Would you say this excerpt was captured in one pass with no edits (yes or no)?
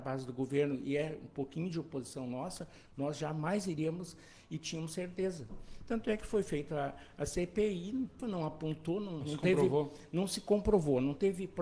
no